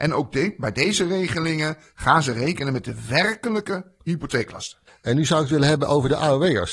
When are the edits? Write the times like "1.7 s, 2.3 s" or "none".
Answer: 4.9 s